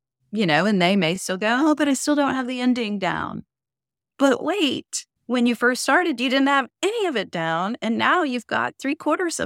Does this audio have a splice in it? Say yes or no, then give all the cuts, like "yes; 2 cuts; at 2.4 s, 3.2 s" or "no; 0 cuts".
no; 0 cuts